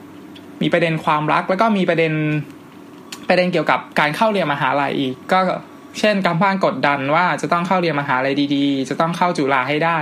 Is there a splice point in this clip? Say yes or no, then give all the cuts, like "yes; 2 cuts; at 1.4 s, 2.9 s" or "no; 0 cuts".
no; 0 cuts